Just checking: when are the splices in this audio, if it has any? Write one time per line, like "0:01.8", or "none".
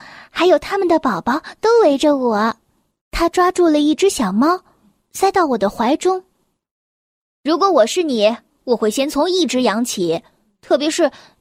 none